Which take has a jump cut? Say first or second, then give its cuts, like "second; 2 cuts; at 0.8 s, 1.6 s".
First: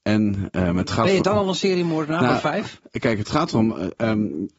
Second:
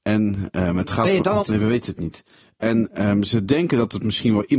second; 2 cuts; at 1.4 s, 3.2 s